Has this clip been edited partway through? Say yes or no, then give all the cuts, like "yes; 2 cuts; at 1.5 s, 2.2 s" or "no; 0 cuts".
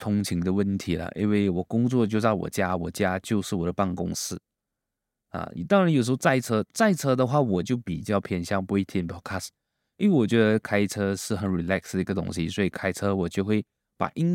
no; 0 cuts